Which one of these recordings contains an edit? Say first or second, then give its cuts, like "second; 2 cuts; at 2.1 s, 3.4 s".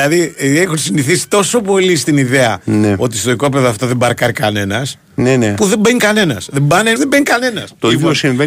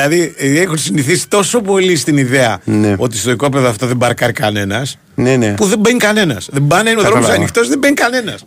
first; 1 cut; at 7.0 s